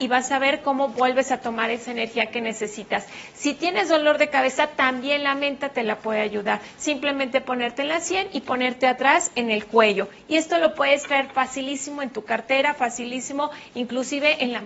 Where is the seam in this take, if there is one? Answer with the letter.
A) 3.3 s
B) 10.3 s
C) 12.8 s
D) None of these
D